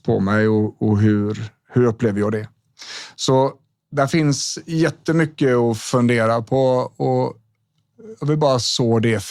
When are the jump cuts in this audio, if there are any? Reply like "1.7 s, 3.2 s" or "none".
none